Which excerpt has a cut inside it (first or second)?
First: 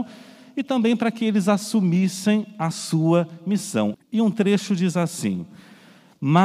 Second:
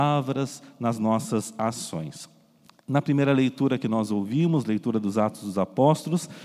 first